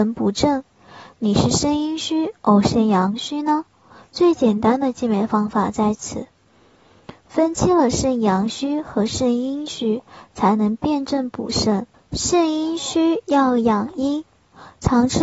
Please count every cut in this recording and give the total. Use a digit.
1